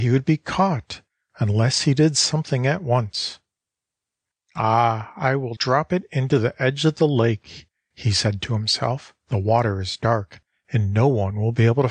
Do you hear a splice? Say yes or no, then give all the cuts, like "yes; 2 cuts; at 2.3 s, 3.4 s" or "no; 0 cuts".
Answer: yes; 2 cuts; at 5.6 s, 9.2 s